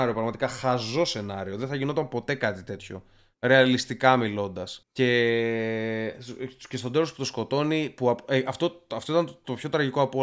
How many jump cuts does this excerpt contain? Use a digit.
1